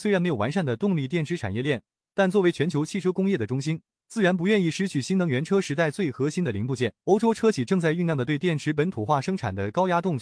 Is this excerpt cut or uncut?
cut